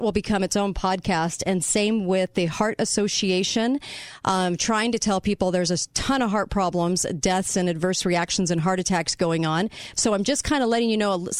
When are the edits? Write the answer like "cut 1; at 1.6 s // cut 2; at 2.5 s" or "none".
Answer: cut 1; at 9.9 s